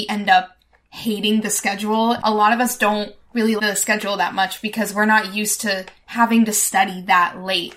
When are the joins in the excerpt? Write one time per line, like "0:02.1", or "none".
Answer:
0:02.2
0:03.6